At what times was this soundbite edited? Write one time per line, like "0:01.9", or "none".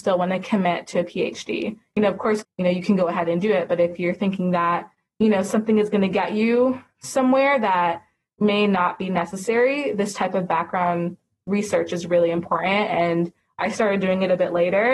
0:02.4